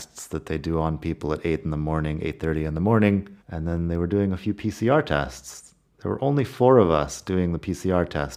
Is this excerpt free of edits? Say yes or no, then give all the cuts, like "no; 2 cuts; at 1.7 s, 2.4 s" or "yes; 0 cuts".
no; 1 cut; at 3.4 s